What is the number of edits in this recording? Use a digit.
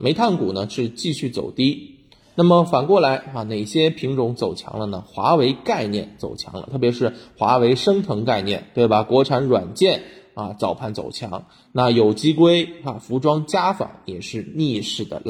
0